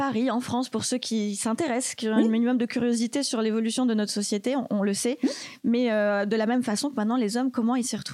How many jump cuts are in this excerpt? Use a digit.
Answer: 0